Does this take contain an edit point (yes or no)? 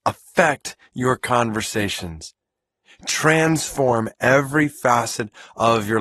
yes